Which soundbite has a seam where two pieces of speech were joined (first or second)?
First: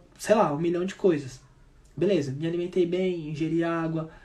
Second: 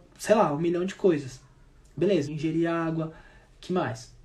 second